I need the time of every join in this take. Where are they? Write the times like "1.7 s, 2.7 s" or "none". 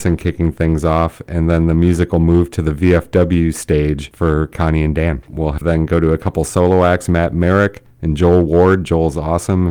5.2 s